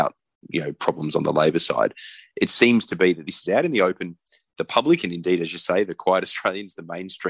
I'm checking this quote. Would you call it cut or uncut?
uncut